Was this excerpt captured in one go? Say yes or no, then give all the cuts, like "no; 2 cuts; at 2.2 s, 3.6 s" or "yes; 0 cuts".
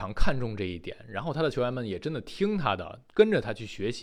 no; 1 cut; at 3.1 s